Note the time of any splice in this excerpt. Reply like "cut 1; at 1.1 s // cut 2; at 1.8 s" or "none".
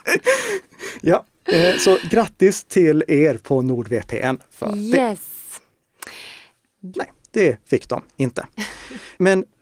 cut 1; at 6.9 s